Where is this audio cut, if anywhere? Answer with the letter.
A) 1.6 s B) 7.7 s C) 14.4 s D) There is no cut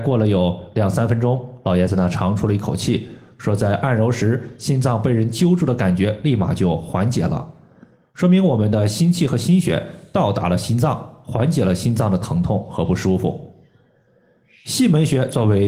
D